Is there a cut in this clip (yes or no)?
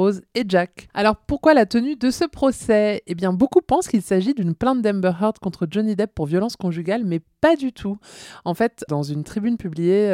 yes